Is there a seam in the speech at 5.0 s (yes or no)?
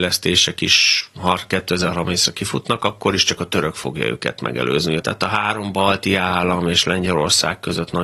yes